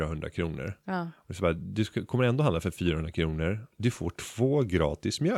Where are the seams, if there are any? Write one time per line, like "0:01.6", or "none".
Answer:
none